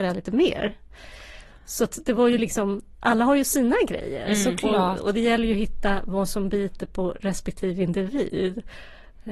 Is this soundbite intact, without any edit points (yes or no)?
yes